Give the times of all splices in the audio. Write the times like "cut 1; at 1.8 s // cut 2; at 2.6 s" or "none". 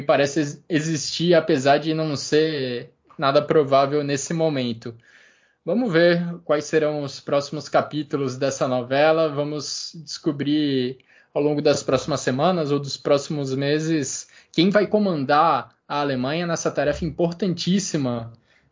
none